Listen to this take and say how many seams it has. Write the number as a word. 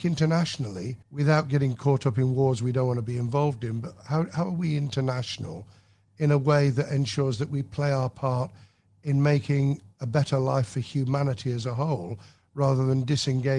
one